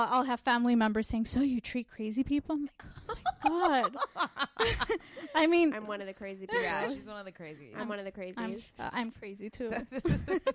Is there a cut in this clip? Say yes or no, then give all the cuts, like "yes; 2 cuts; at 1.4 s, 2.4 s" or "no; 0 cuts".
no; 0 cuts